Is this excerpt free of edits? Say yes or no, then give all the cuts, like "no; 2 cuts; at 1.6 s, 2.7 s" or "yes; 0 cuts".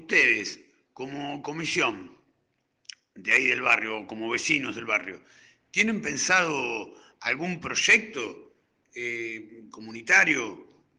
yes; 0 cuts